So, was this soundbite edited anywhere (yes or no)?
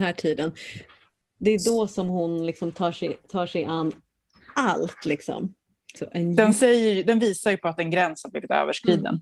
yes